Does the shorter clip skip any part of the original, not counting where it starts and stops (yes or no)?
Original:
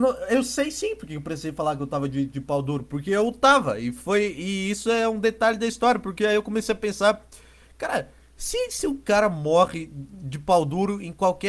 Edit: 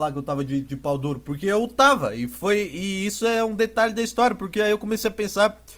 no